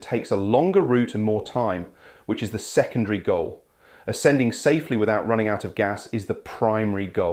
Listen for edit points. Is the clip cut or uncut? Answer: cut